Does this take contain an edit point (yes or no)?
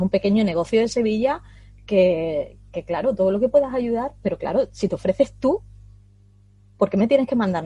no